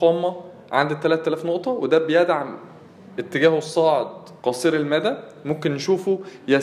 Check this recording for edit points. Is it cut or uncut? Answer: cut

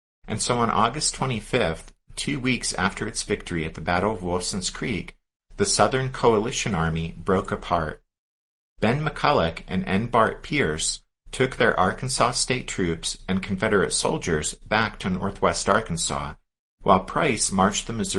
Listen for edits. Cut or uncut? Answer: uncut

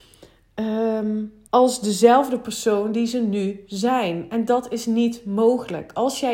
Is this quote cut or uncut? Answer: cut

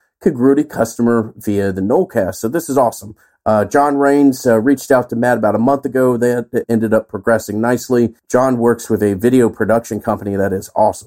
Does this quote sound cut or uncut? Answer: cut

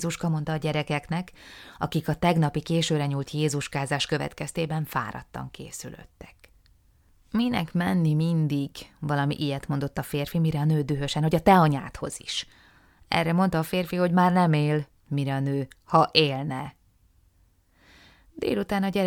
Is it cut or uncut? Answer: uncut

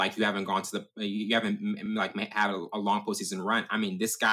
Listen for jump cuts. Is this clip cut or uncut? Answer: uncut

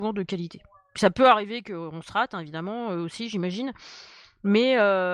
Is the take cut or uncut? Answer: uncut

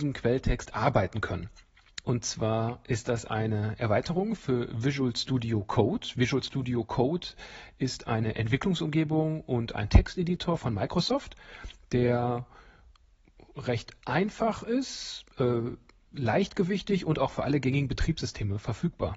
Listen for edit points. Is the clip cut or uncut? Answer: cut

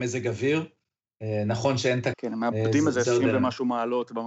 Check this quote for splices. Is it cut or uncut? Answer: cut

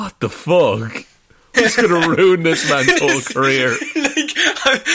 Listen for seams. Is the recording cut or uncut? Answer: cut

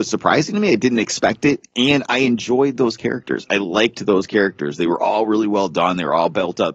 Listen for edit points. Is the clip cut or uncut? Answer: uncut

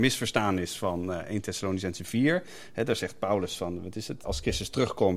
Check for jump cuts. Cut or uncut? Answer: cut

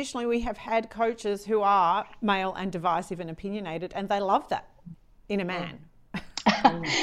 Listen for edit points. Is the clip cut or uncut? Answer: uncut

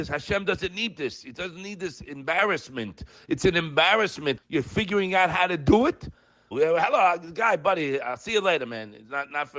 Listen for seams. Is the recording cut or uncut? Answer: cut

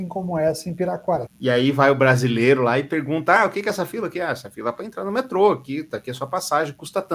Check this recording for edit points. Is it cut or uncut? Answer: cut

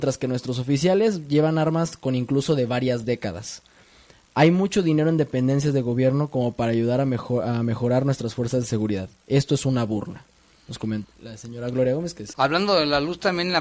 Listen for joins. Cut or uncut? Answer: cut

